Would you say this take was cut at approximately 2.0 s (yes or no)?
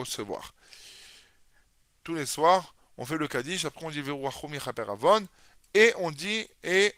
yes